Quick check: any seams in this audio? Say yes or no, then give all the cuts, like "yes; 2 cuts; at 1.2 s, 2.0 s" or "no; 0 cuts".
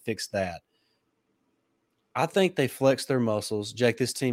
no; 0 cuts